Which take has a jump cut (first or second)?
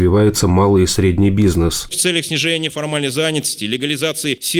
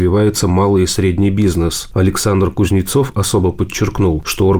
first